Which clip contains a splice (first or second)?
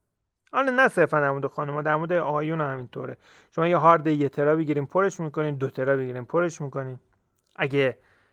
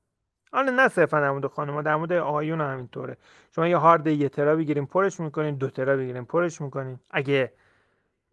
second